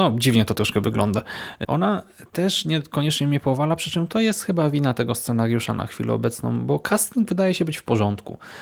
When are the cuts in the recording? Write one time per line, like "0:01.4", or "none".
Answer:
0:01.6